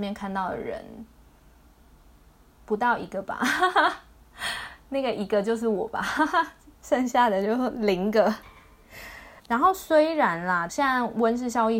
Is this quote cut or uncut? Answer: cut